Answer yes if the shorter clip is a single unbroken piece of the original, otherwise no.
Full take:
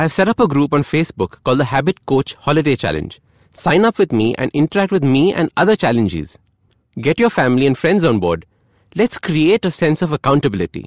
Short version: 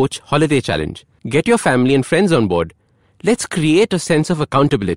no